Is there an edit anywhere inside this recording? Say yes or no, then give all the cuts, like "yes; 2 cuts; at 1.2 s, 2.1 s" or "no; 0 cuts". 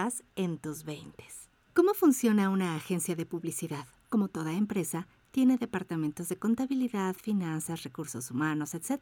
no; 0 cuts